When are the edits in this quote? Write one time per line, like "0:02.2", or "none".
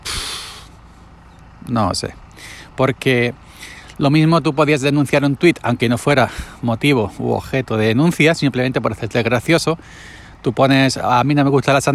none